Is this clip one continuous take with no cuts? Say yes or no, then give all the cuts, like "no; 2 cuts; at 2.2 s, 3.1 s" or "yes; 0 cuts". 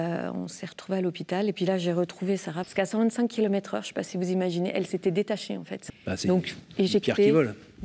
no; 2 cuts; at 2.6 s, 5.9 s